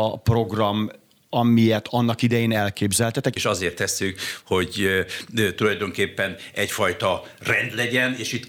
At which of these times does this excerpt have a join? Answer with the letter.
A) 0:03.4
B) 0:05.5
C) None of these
A